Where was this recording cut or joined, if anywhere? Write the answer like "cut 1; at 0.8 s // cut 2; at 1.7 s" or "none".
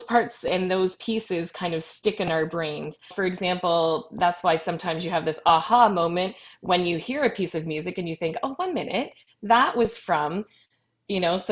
cut 1; at 3.1 s